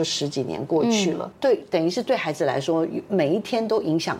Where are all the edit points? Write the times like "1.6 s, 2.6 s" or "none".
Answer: 1.3 s